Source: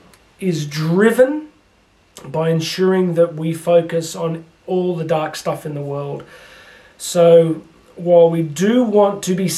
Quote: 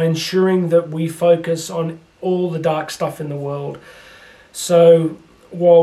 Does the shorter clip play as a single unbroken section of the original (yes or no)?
yes